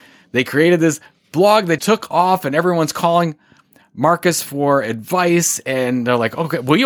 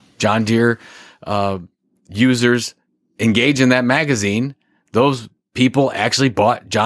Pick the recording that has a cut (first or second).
first